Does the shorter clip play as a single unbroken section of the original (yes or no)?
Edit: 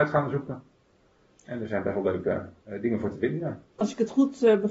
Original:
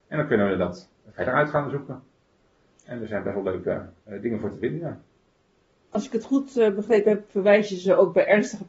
no